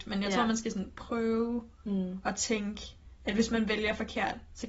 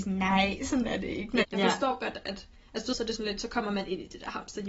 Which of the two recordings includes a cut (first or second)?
second